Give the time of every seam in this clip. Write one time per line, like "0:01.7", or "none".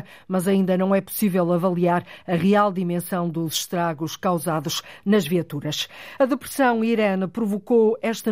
none